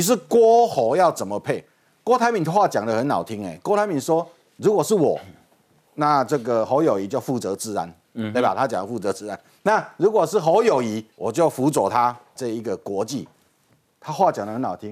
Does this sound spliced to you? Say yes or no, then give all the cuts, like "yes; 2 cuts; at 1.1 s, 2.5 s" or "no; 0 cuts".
yes; 2 cuts; at 11.1 s, 12.4 s